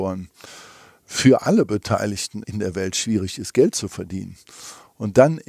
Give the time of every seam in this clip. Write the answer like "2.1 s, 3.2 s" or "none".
2.4 s